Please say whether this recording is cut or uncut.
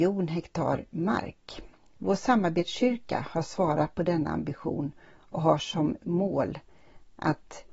uncut